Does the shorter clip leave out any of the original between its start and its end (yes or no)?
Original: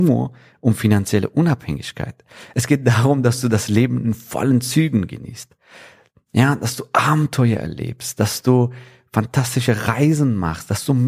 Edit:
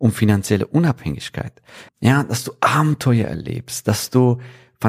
yes